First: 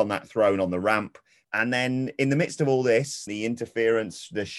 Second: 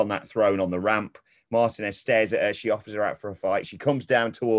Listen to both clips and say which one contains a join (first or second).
first